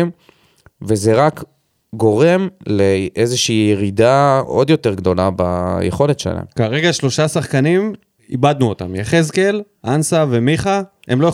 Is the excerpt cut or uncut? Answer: uncut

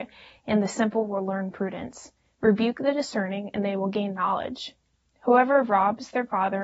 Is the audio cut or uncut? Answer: uncut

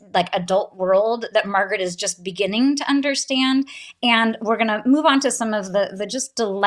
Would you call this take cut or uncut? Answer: uncut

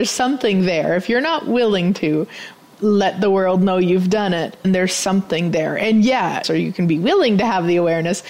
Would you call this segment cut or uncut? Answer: cut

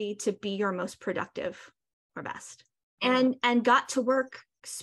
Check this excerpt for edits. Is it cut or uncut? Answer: cut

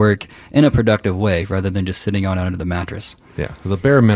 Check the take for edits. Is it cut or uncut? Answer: uncut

